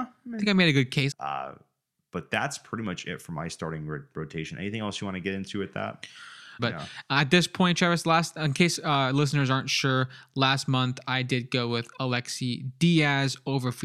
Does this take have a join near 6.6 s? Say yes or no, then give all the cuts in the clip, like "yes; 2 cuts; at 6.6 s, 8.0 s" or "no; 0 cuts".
yes; 2 cuts; at 1.1 s, 6.6 s